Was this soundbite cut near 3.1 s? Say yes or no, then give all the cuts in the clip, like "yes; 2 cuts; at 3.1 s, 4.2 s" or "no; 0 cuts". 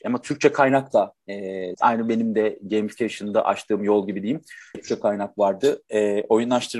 no; 2 cuts; at 1.7 s, 4.7 s